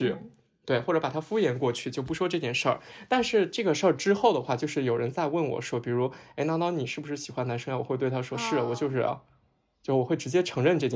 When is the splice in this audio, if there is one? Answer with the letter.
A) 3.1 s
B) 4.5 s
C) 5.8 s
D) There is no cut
D